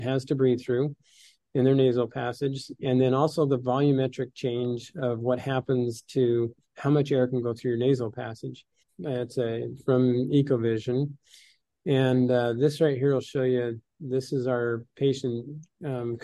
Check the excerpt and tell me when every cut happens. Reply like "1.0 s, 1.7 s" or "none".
8.8 s